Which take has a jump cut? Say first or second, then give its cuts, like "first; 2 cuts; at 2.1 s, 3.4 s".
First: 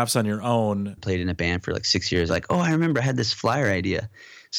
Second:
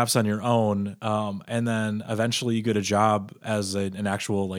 first; 2 cuts; at 1.0 s, 2.3 s